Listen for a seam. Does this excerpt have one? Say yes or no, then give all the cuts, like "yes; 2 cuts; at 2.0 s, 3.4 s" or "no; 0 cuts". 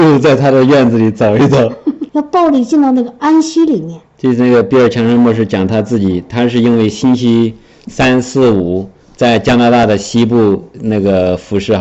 yes; 2 cuts; at 2.1 s, 4.1 s